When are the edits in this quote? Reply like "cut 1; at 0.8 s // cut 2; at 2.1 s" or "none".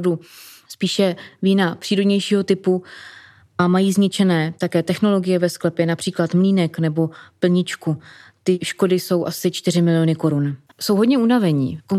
cut 1; at 10.7 s

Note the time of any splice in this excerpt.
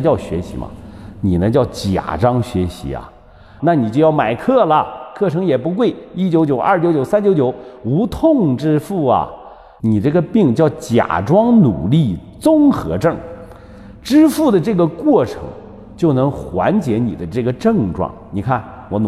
cut 1; at 3.6 s // cut 2; at 9.8 s

